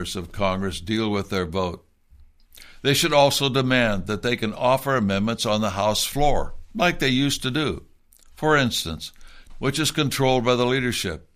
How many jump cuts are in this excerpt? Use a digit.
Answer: 1